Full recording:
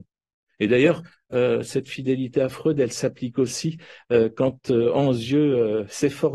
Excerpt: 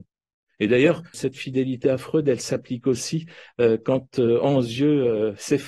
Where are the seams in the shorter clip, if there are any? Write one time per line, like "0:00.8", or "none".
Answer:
0:01.1